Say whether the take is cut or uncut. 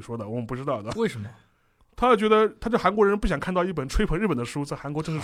uncut